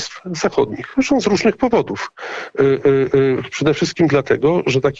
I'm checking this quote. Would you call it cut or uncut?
uncut